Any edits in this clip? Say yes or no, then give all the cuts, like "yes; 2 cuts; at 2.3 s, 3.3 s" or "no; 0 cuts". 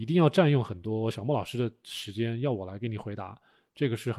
no; 0 cuts